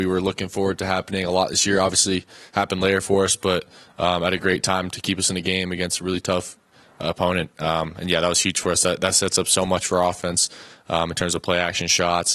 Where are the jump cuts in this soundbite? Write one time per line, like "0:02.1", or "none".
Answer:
none